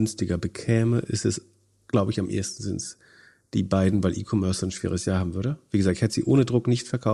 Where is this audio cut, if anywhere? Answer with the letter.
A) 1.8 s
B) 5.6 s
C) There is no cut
C